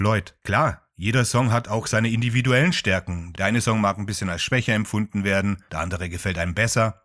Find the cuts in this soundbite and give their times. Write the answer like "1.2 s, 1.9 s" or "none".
none

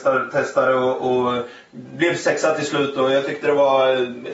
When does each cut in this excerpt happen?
none

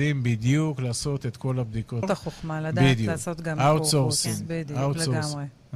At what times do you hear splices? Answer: 2.0 s

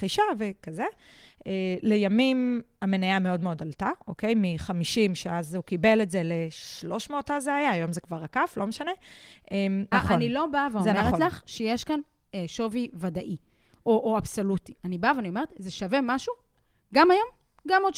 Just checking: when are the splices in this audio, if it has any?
9.9 s

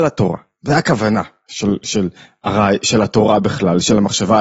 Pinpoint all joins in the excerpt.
none

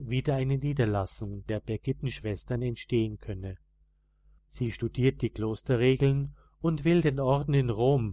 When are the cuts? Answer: 4.4 s

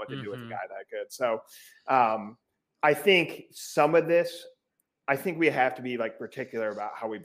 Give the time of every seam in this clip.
none

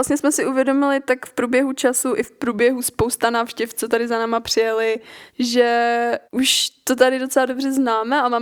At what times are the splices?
6.2 s

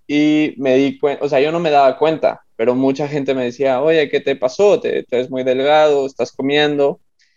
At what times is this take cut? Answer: 5.1 s

